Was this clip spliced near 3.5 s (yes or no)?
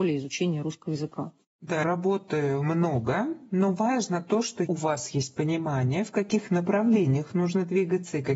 no